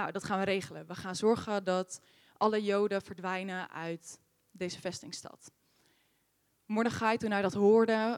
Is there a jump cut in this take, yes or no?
no